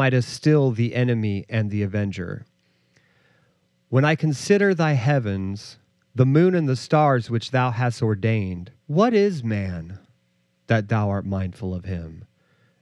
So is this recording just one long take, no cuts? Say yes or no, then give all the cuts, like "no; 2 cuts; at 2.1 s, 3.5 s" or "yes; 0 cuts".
no; 2 cuts; at 6.1 s, 8.8 s